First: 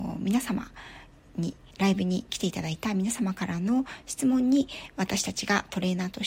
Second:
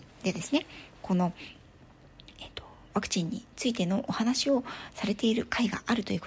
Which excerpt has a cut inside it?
first; 1 cut; at 1.7 s

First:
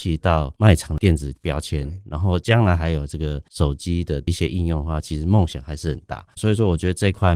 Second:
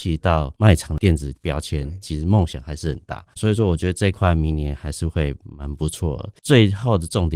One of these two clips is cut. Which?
second; 2 cuts; at 2.0 s, 6.4 s

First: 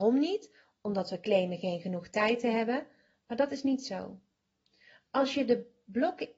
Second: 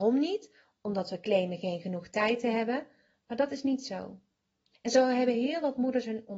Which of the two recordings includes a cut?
second; 1 cut; at 4.7 s

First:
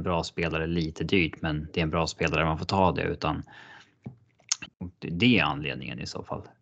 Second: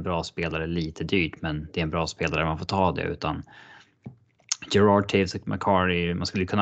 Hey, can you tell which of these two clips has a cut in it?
first; 1 cut; at 4.7 s

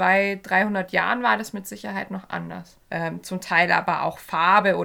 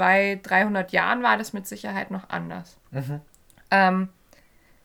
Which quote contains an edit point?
first; 1 cut; at 2.8 s

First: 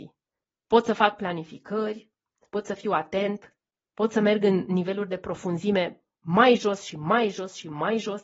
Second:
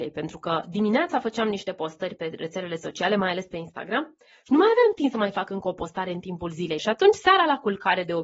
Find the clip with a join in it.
second; 2 cuts; at 2.2 s, 6.8 s

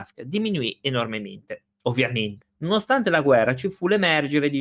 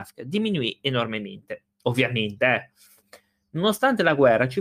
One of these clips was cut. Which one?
first; 1 cut; at 2.4 s

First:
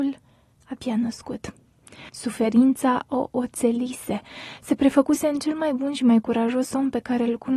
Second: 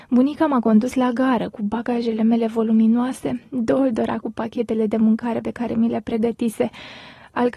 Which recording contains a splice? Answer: first; 1 cut; at 2.1 s

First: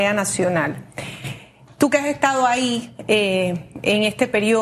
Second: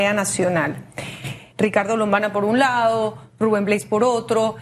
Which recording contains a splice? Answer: second; 1 cut; at 1.5 s

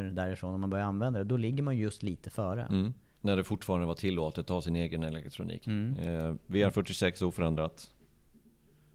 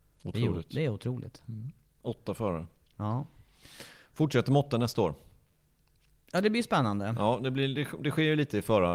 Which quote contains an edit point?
first; 2 cuts; at 3.2 s, 5.6 s

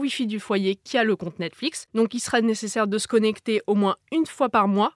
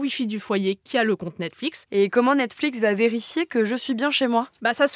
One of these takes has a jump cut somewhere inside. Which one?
second; 1 cut; at 1.9 s

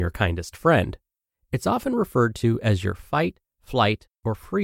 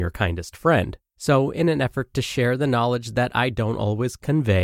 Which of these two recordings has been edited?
second; 1 cut; at 1.1 s

